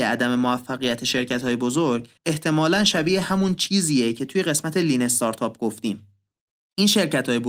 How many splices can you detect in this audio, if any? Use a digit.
1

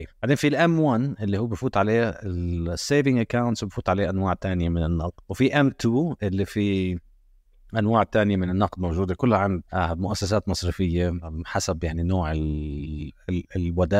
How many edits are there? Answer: 0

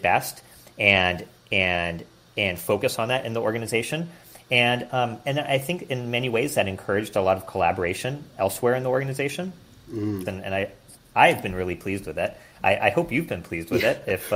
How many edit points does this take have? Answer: 1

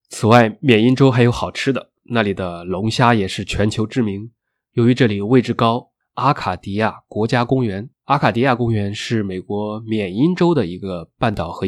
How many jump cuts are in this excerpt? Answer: 2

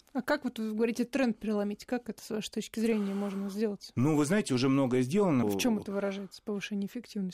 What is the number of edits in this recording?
1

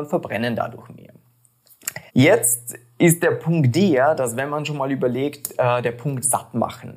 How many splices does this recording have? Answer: 1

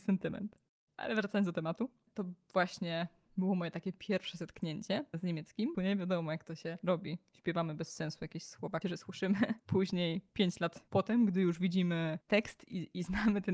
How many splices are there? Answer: 2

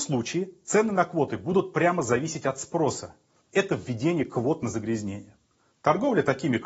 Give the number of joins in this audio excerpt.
1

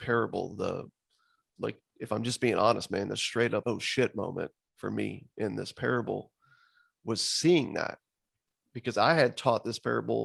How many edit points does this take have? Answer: 2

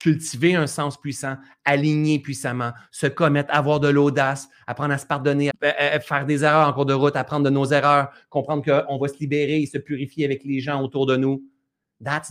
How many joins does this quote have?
1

